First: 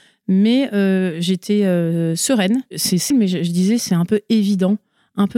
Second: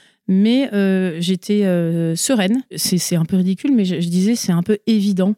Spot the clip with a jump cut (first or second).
first